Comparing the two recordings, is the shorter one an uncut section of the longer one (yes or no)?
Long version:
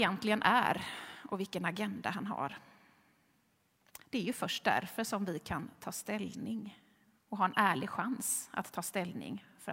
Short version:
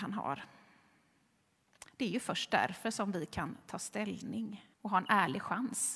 no